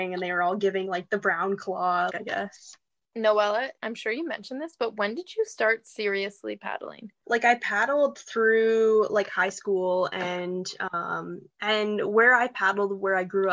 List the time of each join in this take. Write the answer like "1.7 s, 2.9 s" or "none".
2.1 s